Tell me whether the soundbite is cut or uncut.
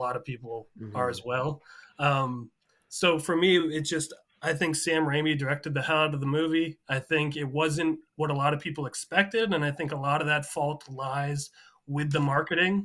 uncut